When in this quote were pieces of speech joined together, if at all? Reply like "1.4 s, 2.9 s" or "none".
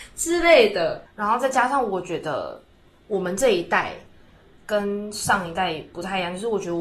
1.0 s

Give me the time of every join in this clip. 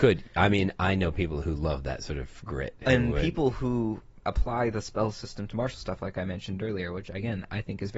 none

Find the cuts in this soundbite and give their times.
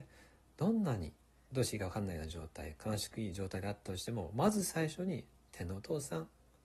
1.5 s

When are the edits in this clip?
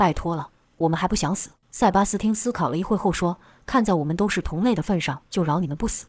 1.6 s

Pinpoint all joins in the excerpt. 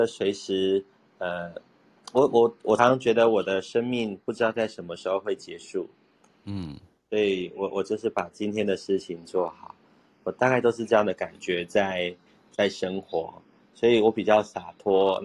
2.8 s

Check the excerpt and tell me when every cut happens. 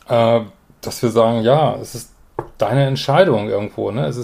none

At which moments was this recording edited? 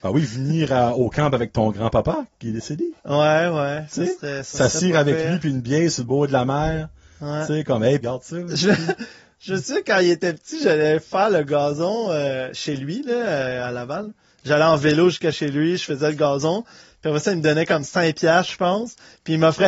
8.0 s

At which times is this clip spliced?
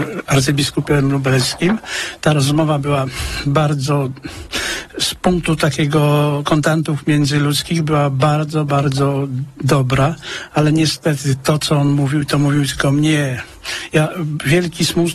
none

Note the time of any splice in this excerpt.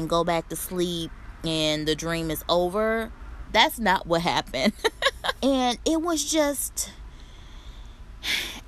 3.5 s, 5.4 s

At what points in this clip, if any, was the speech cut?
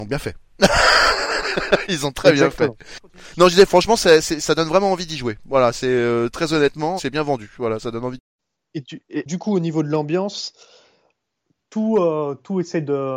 7.0 s

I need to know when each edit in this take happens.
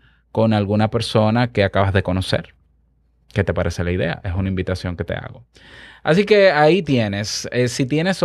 none

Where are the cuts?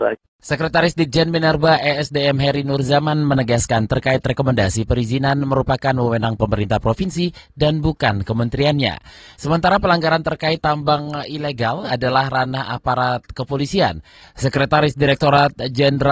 14.2 s

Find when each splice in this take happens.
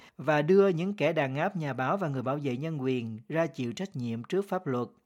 none

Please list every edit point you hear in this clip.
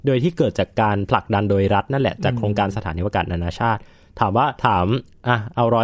4.6 s

